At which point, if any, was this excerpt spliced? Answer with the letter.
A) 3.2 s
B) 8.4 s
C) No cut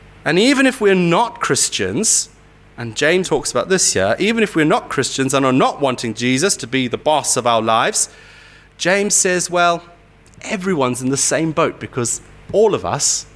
A